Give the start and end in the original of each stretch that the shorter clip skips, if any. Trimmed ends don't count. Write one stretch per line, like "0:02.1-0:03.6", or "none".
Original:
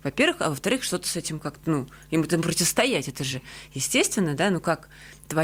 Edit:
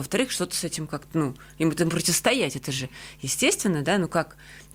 none